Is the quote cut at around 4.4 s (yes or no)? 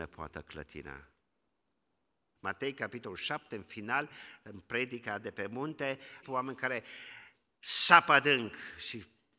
no